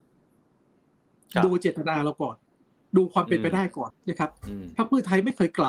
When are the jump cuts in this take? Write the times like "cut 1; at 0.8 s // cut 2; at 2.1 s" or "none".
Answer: cut 1; at 3.9 s